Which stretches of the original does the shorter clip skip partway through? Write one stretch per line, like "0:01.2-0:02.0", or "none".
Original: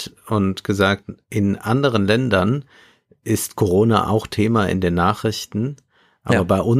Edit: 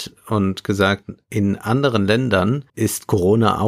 0:02.7-0:03.2